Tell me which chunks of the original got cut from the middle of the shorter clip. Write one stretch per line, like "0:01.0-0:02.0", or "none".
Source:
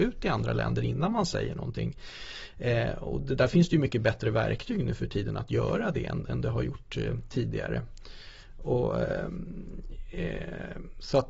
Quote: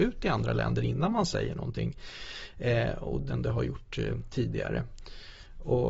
0:03.3-0:06.3